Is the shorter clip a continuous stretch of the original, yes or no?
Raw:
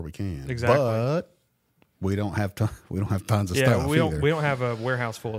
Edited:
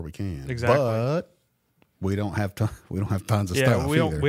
yes